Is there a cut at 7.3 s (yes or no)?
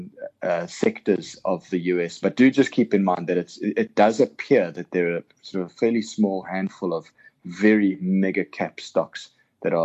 no